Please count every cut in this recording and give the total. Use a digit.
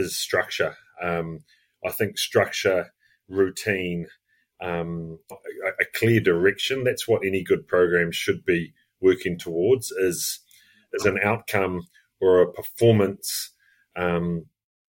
1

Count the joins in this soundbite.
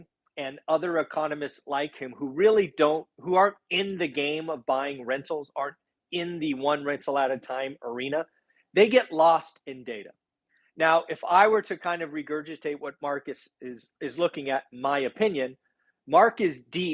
0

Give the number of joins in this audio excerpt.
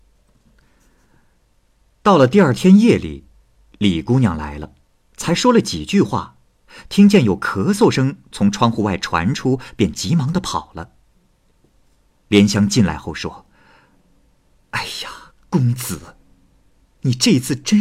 0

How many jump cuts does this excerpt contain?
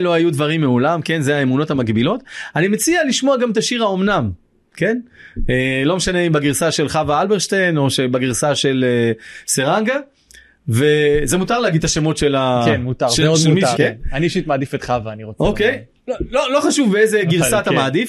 1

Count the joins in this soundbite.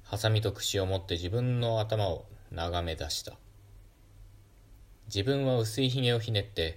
1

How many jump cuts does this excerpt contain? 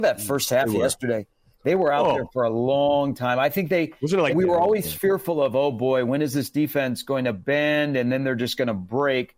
1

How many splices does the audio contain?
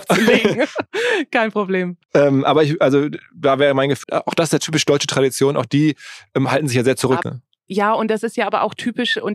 2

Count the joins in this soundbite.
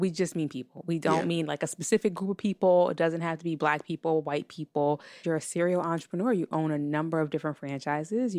1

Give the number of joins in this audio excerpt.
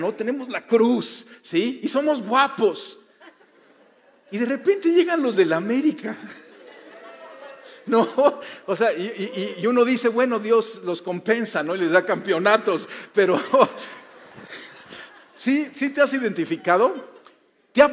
0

